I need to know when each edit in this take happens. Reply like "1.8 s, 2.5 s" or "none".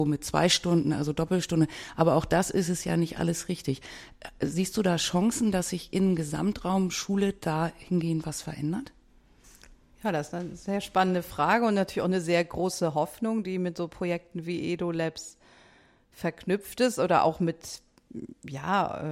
none